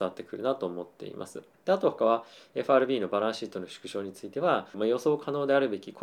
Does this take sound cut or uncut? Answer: cut